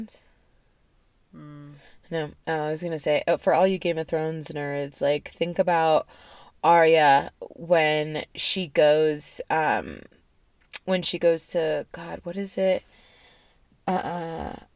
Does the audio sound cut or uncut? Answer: uncut